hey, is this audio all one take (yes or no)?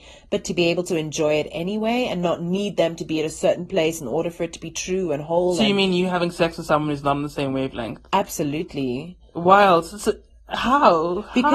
yes